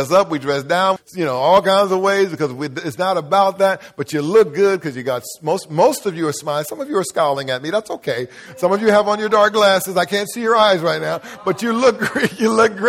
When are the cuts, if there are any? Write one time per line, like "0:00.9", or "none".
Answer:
0:01.0